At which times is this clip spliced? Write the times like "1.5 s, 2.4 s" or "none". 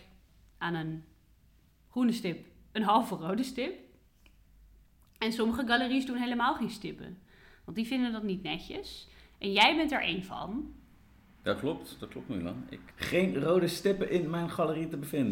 12.9 s